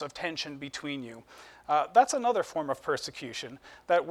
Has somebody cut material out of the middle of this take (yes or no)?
no